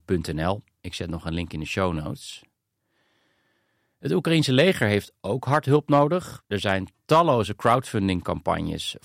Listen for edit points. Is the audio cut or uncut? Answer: uncut